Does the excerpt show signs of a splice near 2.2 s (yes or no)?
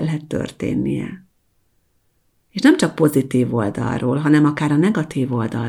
no